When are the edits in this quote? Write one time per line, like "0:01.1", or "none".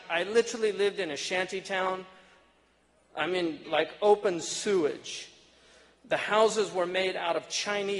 0:03.6